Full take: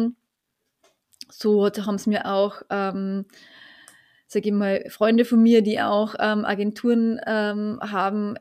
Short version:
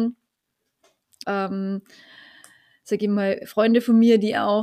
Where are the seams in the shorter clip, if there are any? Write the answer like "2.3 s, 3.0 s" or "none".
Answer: 1.2 s